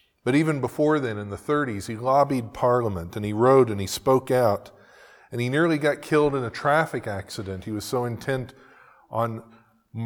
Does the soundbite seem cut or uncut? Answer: uncut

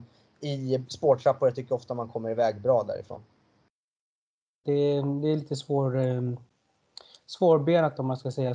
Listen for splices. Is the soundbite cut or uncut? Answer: cut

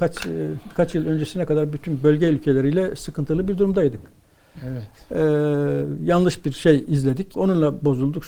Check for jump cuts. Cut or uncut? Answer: cut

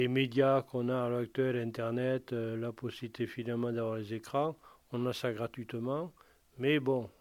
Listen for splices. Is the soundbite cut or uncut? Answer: uncut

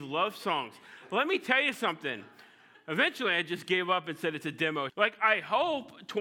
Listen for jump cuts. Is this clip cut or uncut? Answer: cut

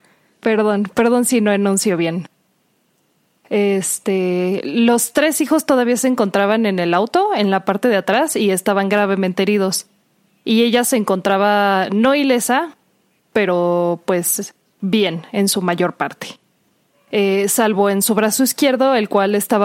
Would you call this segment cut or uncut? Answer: uncut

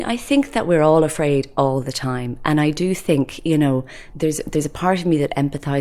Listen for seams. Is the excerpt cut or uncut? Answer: cut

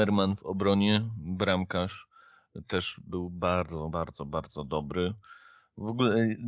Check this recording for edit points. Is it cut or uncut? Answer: cut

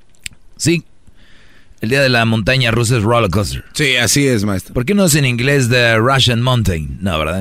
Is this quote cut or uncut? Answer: uncut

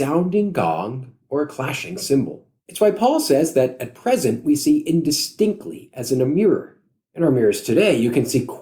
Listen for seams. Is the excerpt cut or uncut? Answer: cut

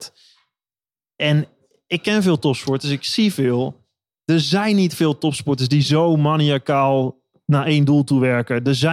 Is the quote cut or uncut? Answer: uncut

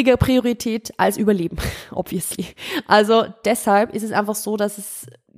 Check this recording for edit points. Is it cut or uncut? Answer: uncut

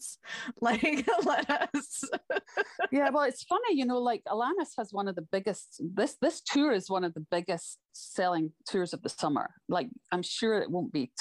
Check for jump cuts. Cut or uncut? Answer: cut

